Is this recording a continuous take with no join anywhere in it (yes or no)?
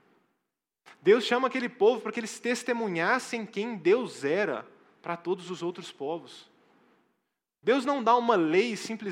yes